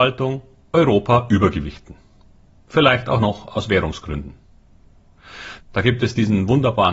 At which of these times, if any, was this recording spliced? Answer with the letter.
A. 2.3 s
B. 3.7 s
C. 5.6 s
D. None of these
C